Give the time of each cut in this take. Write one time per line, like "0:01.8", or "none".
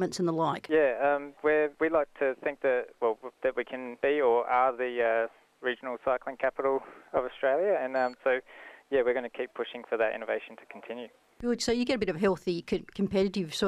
none